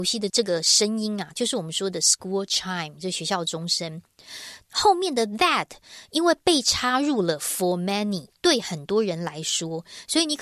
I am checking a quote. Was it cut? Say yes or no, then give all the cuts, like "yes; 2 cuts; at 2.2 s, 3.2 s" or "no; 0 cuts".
no; 0 cuts